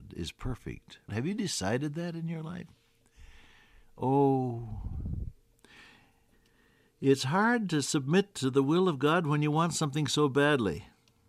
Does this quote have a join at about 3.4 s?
no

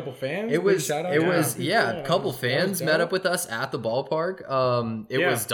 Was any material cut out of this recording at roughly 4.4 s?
no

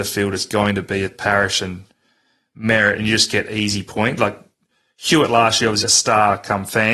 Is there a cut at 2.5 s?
no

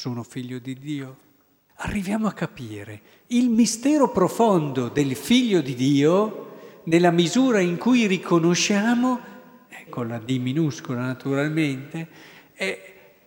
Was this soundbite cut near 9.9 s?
yes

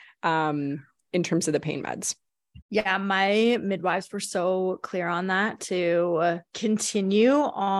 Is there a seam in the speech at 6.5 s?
yes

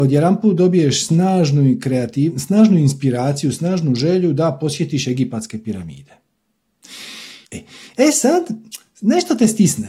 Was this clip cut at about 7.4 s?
yes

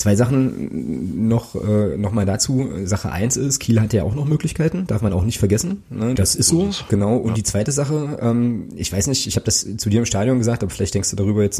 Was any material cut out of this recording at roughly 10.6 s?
no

